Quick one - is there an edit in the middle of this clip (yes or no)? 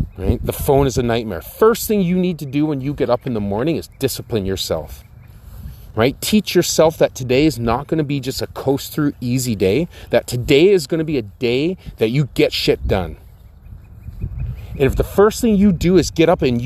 no